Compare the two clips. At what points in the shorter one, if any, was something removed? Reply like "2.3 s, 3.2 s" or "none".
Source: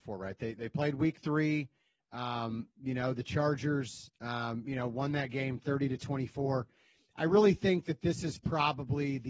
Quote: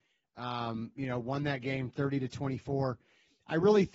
1.0 s